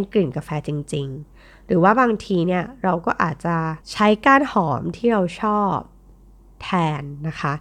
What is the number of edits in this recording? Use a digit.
1